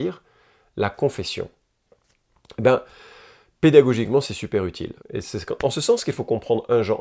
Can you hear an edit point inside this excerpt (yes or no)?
yes